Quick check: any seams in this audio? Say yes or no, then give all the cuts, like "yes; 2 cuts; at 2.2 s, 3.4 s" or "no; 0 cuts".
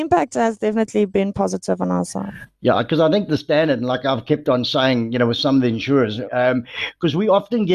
yes; 1 cut; at 6.3 s